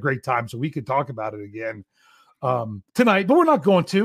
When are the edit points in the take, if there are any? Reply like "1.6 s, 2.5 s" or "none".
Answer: 2.9 s